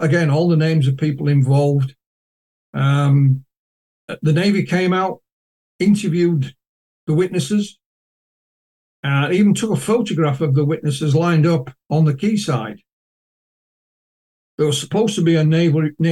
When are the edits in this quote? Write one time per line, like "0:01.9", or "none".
none